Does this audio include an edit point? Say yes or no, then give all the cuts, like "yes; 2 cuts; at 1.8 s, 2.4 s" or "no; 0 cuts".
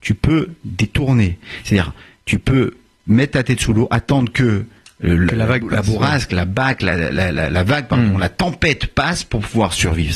no; 0 cuts